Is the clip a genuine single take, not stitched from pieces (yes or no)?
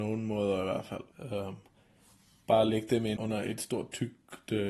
no